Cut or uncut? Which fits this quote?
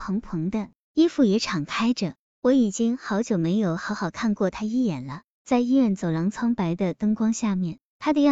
uncut